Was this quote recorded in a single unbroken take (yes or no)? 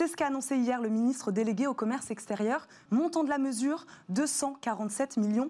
no